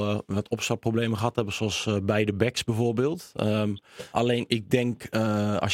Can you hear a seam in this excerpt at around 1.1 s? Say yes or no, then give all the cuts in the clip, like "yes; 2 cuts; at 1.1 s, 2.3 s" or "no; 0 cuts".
no; 1 cut; at 4.1 s